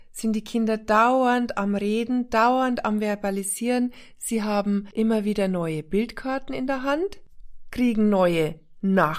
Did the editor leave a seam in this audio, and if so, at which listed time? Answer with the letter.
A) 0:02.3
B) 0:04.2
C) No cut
C